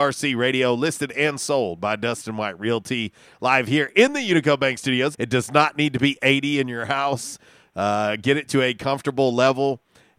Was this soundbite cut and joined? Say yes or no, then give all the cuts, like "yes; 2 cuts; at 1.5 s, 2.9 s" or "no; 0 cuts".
yes; 1 cut; at 5.1 s